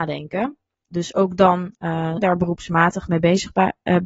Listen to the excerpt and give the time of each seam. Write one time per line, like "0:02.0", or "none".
0:00.9
0:02.2